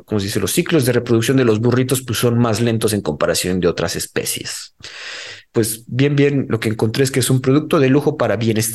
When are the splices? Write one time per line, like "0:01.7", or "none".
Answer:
0:05.5